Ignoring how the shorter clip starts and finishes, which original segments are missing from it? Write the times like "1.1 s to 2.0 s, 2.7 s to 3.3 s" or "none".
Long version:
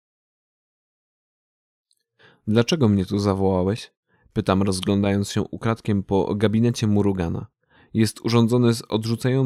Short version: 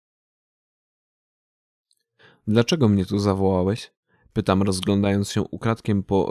none